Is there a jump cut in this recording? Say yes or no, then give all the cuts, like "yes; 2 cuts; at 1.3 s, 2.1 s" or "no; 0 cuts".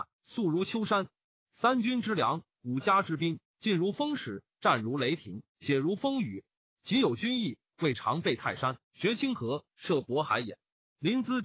no; 0 cuts